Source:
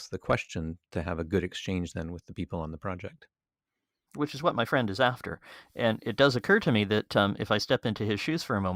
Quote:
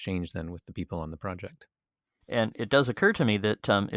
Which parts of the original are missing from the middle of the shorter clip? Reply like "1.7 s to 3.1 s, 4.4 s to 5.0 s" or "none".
3.8 s to 5.7 s